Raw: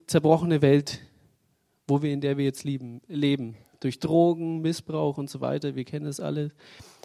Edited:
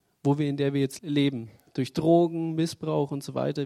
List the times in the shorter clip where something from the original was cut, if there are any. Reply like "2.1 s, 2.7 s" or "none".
1.0 s